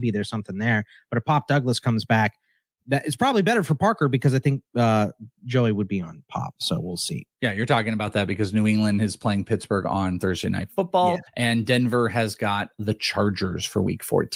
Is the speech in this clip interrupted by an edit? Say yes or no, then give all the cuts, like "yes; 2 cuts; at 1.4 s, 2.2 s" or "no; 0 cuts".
no; 0 cuts